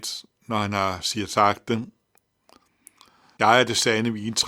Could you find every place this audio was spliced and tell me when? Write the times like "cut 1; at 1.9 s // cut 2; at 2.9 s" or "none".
cut 1; at 3.4 s